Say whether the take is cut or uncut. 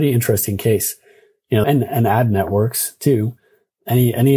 cut